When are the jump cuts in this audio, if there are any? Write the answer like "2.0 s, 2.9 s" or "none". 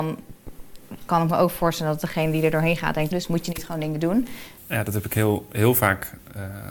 3.1 s, 4.6 s